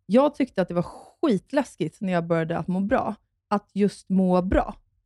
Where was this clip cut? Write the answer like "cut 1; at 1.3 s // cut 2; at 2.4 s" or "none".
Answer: none